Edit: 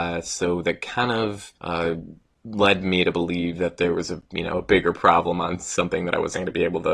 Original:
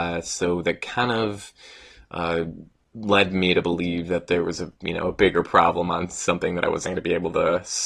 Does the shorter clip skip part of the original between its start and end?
yes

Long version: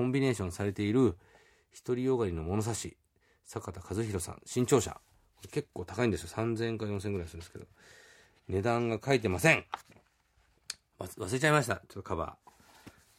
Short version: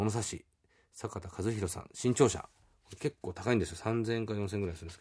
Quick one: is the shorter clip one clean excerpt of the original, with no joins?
yes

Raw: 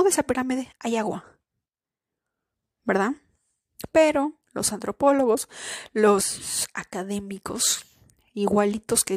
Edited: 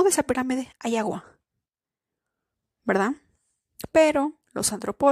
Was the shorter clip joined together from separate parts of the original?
no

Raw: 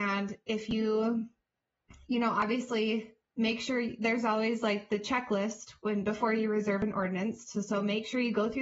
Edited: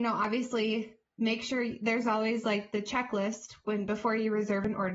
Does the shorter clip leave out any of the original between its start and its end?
no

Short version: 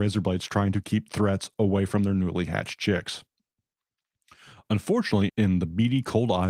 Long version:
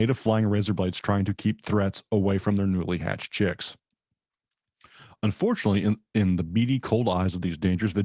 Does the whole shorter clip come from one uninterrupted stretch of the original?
no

